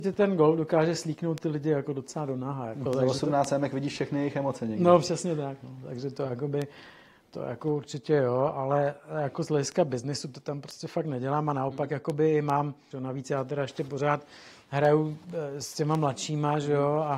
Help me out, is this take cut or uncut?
cut